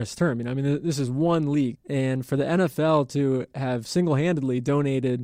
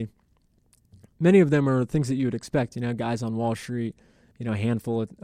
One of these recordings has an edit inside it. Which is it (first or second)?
first